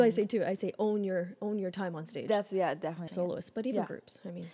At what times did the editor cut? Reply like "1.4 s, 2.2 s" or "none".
3.1 s

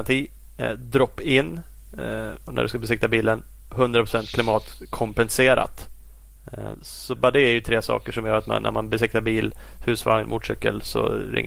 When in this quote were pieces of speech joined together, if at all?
7.2 s

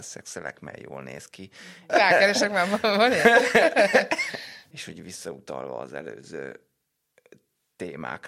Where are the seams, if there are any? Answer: 1.9 s, 4.7 s

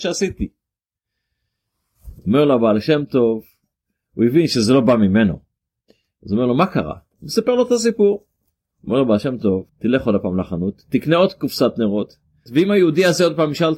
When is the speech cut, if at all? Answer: 9.7 s, 12.5 s

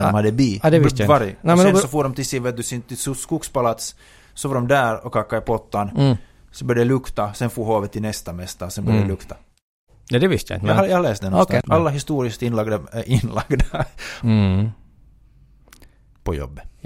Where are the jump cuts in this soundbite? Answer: 11.6 s, 14.2 s

